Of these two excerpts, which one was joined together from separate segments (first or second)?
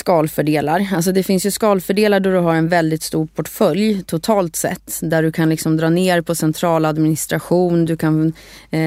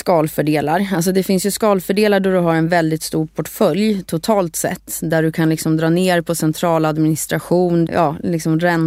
second